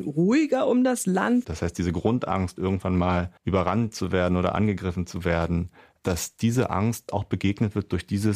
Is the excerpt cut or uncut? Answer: cut